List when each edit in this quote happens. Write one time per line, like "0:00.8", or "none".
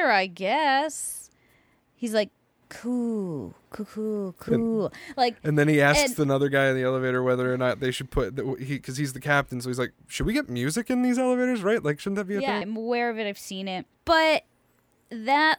0:03.9
0:12.6
0:13.9